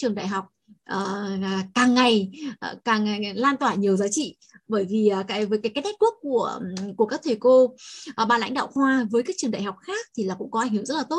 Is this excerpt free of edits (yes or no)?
yes